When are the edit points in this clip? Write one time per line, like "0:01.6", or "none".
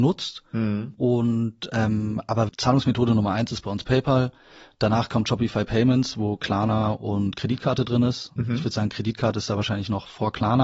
0:02.5